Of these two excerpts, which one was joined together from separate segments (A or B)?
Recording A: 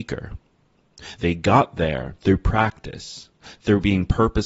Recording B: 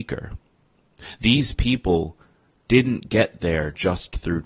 A